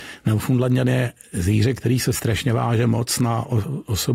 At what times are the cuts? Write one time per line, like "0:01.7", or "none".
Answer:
none